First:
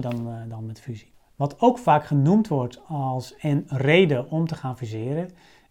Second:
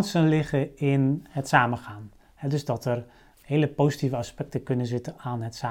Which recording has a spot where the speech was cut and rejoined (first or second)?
second